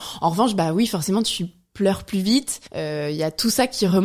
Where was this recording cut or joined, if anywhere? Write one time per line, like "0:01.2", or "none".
0:02.7